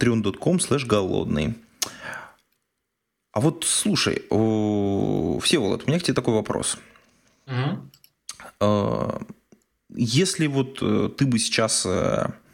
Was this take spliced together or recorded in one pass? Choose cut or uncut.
uncut